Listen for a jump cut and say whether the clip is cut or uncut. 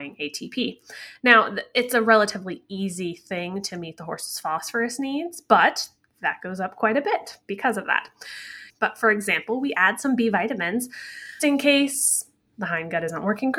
cut